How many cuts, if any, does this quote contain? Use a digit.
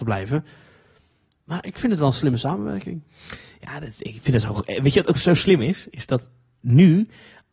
1